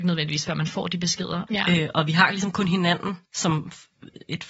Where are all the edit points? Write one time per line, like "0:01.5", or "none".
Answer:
0:01.5
0:03.2